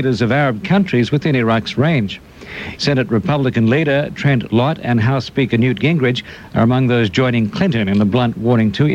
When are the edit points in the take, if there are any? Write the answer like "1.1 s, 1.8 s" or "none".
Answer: 2.8 s